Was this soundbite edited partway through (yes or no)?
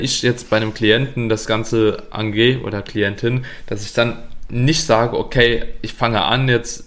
no